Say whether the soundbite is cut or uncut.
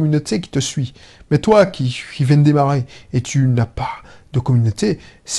uncut